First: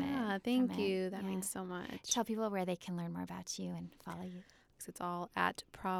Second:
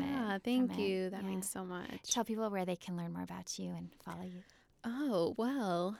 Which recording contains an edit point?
first; 1 cut; at 4.8 s

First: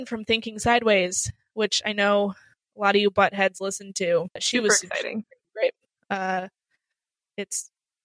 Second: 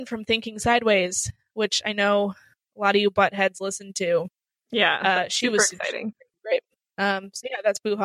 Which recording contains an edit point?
first; 2 cuts; at 4.4 s, 6.0 s

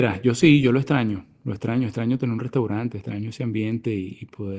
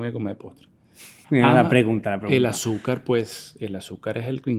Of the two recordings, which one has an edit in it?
second; 1 cut; at 1.2 s

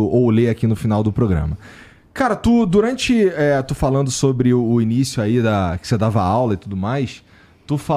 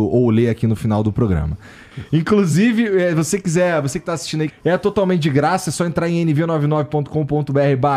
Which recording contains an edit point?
second; 2 cuts; at 1.9 s, 4.5 s

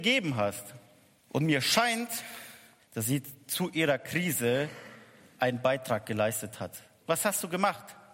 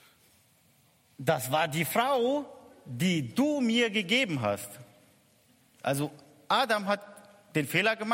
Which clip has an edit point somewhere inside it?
first; 3 cuts; at 1.2 s, 2.8 s, 7.0 s

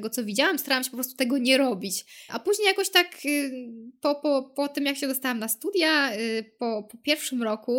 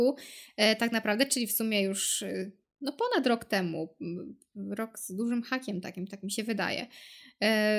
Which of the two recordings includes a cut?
first; 1 cut; at 2.3 s

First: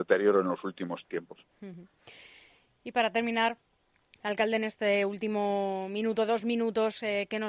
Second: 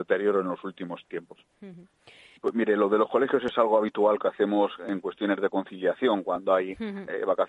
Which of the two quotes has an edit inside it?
second; 1 cut; at 2.4 s

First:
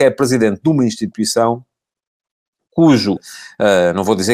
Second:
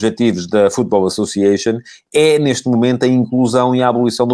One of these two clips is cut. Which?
first; 1 cut; at 3.2 s

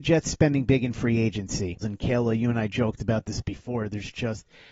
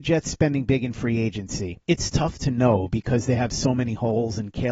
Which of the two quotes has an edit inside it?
first; 1 cut; at 1.8 s

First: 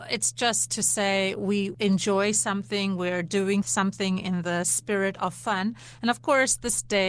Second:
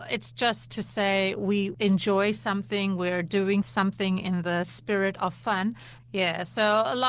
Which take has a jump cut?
second; 1 cut; at 6.0 s

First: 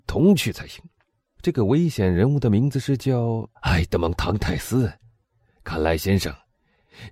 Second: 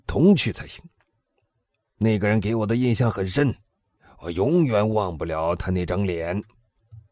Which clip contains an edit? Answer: first; 2 cuts; at 1.4 s, 3.6 s

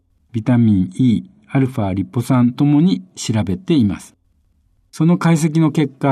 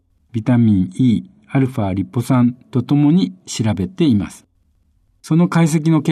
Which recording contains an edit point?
first; 1 cut; at 2.5 s

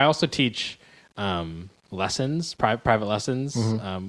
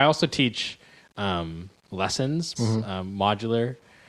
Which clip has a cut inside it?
second; 1 cut; at 2.6 s

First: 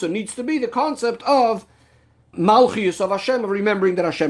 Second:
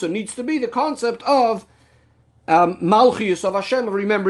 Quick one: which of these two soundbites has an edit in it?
first; 1 cut; at 2.3 s

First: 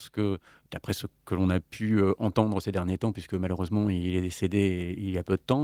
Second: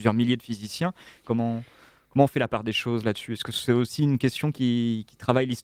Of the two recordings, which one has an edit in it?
second; 1 cut; at 1.2 s

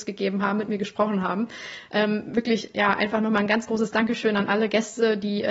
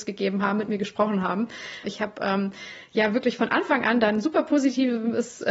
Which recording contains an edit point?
second; 1 cut; at 1.8 s

